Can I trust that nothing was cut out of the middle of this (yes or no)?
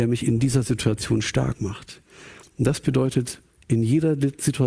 no